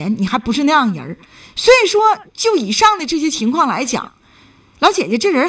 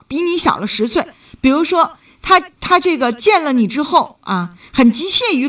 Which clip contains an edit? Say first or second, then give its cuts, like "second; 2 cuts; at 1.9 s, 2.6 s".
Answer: second; 1 cut; at 2.6 s